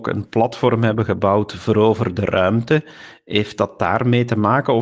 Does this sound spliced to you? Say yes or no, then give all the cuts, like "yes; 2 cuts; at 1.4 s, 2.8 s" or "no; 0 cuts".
no; 0 cuts